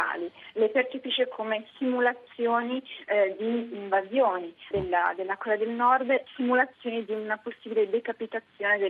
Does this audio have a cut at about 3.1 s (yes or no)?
no